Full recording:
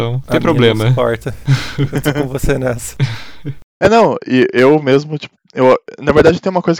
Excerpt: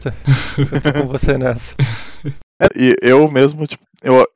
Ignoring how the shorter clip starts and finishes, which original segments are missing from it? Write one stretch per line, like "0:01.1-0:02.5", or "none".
0:03.9-0:04.2